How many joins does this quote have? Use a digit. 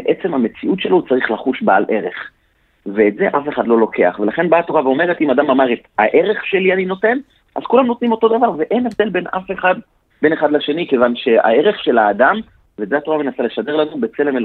0